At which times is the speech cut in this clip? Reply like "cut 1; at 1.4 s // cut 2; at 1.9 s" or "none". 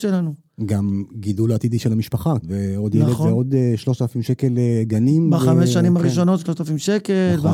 cut 1; at 2.4 s